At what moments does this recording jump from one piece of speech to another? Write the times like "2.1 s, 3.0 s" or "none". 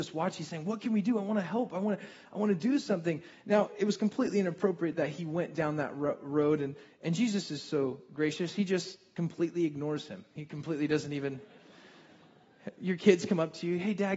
none